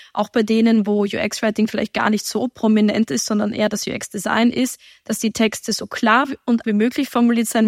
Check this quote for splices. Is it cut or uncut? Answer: cut